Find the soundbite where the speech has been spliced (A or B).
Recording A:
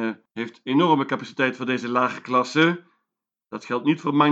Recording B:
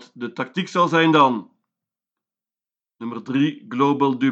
A